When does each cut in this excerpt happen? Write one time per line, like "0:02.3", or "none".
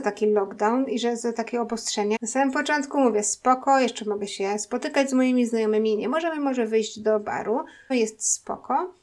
0:02.2
0:07.9